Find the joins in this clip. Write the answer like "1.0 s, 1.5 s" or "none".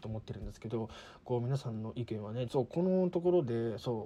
2.5 s